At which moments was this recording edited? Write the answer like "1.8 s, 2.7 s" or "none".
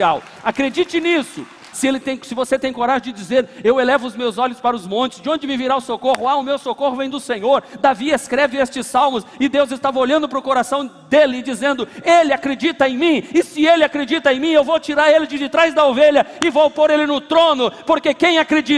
1.7 s